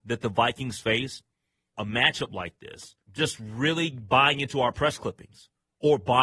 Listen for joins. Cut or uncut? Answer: cut